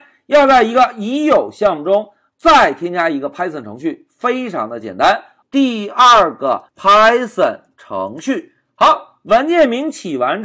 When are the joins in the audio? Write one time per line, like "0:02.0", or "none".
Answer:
0:05.4